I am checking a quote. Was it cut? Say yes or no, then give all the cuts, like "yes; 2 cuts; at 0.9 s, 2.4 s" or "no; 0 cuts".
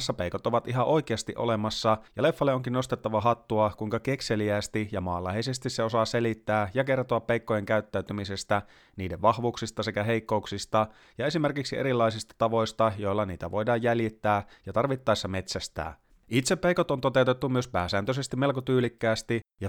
yes; 1 cut; at 16.1 s